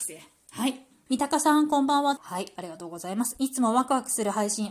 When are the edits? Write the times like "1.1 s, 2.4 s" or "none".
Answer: 1.1 s, 2.2 s